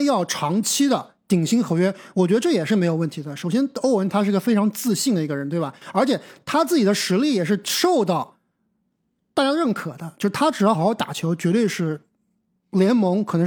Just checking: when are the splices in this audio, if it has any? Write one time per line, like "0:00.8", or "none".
0:10.7